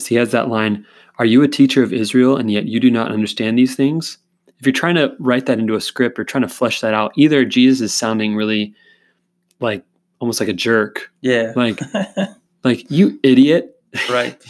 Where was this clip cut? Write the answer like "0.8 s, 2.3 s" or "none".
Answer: none